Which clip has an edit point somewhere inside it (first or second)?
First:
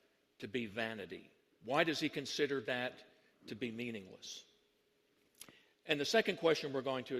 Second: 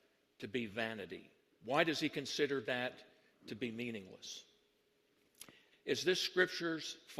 second